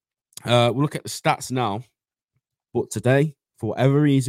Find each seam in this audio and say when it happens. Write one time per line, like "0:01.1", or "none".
0:02.7

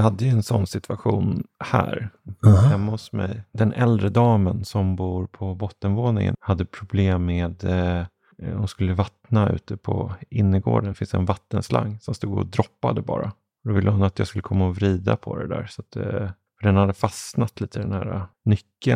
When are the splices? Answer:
none

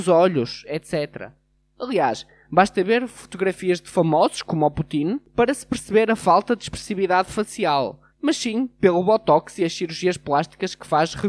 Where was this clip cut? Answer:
0:08.1

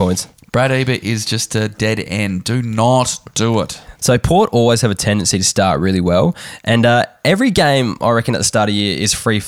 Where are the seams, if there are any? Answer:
0:04.0

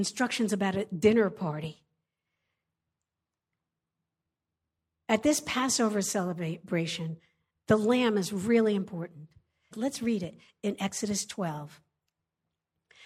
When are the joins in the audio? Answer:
0:05.0
0:09.7

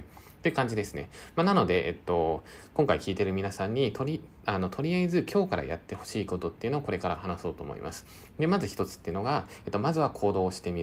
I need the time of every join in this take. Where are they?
none

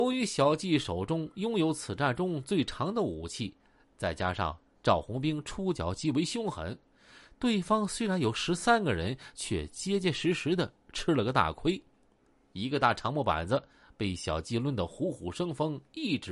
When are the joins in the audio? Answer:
none

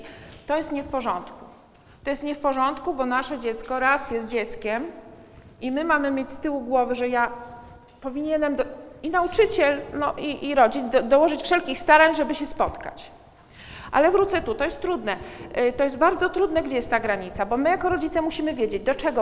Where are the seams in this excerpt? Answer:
none

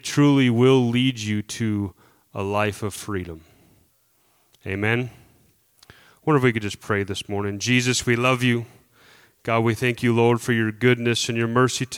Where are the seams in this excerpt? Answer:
none

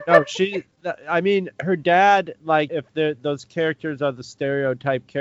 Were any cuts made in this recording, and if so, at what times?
0:02.7

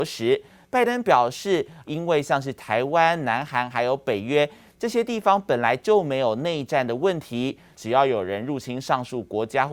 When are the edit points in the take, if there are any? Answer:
0:01.8
0:07.7

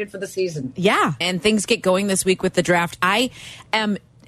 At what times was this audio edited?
0:01.2

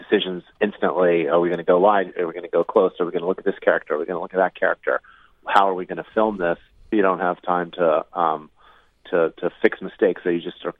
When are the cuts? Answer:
0:06.9

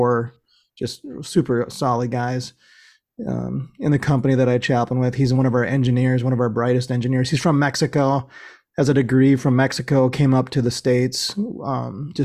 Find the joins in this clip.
none

